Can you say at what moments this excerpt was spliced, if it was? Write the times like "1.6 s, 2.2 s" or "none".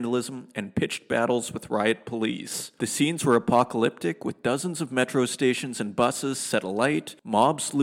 none